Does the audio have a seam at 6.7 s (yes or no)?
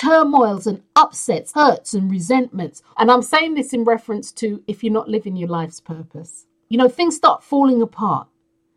yes